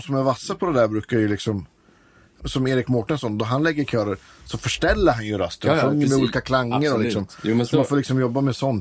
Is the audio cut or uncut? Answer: cut